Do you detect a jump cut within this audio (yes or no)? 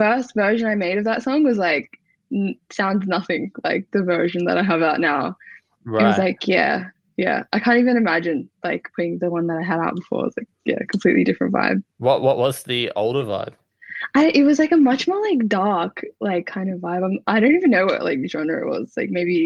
no